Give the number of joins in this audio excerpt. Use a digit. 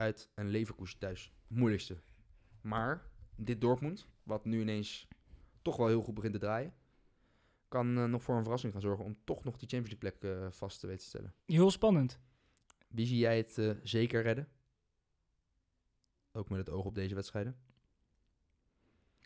1